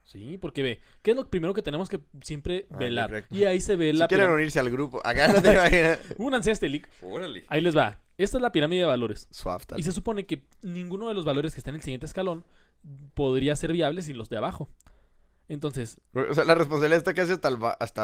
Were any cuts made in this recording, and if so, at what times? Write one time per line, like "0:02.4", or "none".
0:03.2